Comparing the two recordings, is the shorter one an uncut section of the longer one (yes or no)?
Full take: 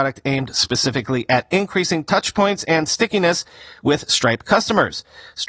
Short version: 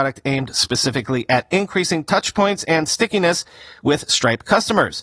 yes